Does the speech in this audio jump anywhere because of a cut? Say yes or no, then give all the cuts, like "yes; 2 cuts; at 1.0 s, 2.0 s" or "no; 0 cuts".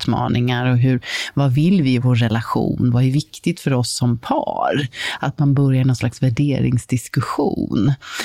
no; 0 cuts